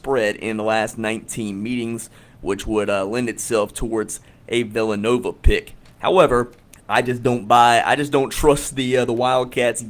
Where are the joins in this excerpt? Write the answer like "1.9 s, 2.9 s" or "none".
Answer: none